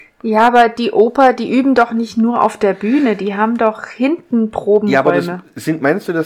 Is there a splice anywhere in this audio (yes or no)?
no